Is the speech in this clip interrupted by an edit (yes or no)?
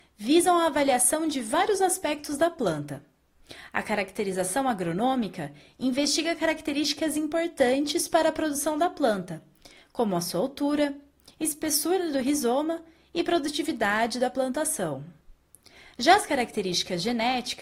no